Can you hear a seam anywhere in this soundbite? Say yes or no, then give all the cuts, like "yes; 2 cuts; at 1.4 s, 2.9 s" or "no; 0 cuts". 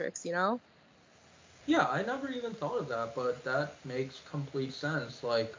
yes; 2 cuts; at 1.6 s, 3.8 s